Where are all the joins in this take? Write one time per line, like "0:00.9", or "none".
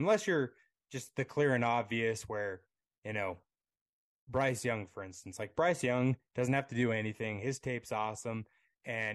none